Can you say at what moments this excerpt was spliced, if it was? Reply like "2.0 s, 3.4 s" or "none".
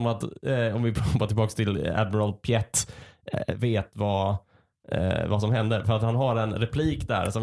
none